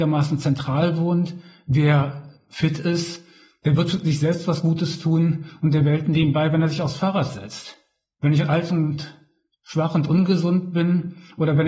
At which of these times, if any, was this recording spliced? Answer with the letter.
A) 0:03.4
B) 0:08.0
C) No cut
C